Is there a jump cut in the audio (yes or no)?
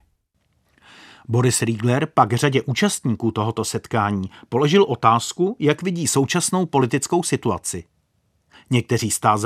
no